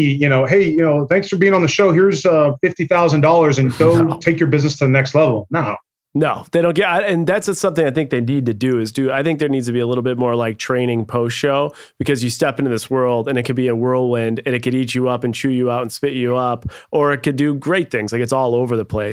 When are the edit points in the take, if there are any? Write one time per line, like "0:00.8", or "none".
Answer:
none